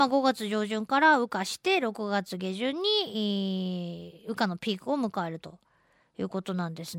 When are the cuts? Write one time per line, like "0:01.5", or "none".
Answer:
none